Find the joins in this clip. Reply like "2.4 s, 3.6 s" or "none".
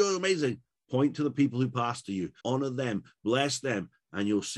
2.4 s